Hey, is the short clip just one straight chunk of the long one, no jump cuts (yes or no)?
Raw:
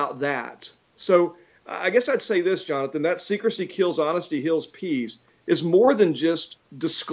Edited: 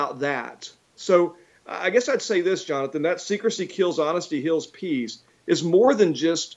yes